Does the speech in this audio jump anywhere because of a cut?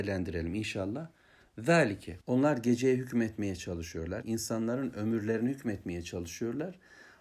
yes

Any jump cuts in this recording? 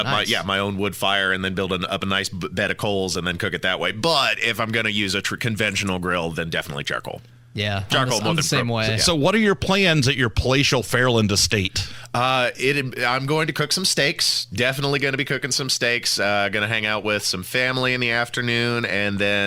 no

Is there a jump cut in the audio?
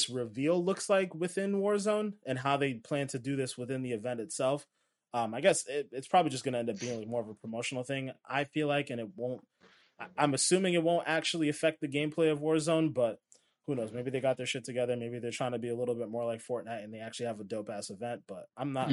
no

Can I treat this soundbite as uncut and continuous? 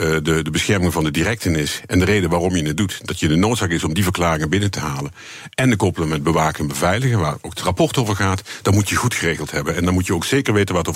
yes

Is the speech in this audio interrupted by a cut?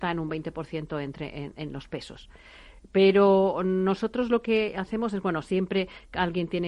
no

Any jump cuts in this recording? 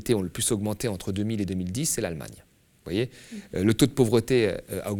no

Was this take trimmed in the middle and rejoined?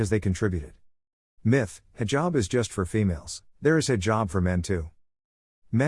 yes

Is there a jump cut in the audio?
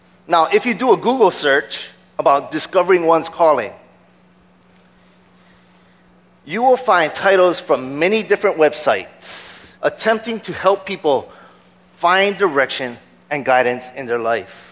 yes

